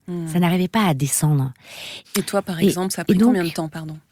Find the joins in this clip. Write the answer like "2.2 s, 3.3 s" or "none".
2.0 s

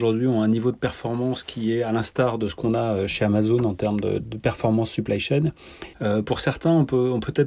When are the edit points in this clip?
4.2 s, 5.9 s

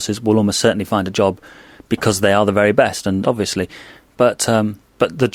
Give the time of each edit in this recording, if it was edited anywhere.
3.2 s

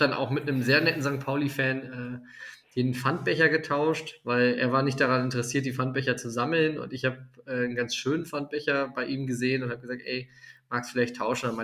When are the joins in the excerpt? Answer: none

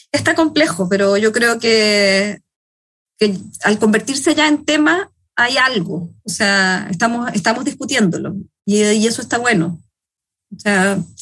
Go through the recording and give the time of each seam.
none

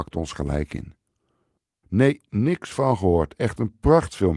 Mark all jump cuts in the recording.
1.8 s

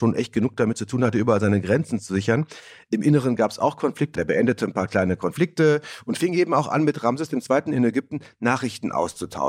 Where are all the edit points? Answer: 4.2 s

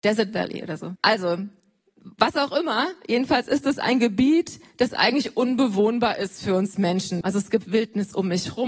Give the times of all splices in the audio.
1.0 s, 7.2 s

